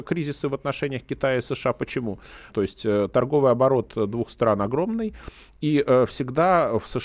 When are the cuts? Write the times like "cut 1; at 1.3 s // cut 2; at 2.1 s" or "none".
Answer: cut 1; at 2.5 s